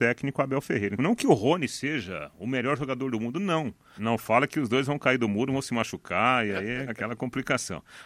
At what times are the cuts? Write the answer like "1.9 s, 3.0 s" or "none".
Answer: 1.0 s, 4.0 s, 6.9 s